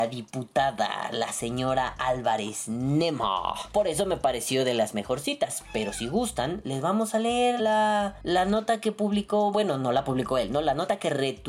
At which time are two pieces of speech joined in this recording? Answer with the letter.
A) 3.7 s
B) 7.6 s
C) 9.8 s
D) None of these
B